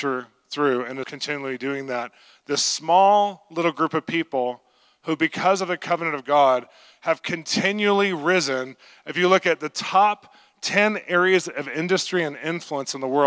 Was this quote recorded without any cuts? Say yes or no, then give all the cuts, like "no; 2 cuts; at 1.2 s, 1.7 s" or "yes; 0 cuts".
no; 1 cut; at 1.0 s